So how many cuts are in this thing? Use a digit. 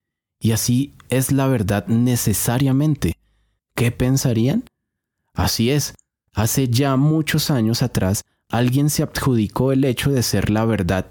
1